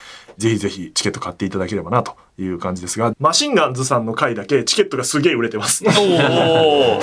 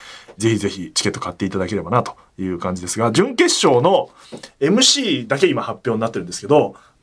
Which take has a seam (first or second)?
first